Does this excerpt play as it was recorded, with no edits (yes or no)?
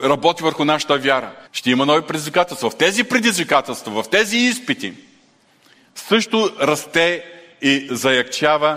no